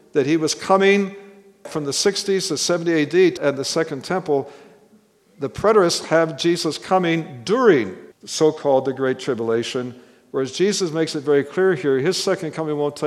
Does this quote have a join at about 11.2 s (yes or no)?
no